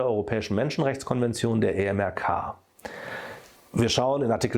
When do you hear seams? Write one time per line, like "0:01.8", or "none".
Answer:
0:03.5